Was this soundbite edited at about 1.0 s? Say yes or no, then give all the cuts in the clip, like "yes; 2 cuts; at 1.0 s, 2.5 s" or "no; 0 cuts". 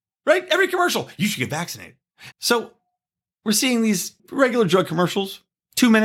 no; 2 cuts; at 2.3 s, 4.2 s